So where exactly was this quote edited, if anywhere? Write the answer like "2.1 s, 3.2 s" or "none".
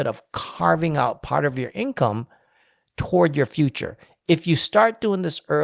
none